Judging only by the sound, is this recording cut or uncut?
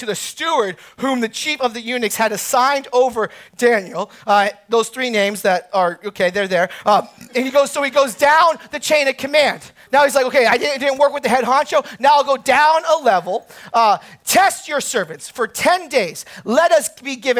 uncut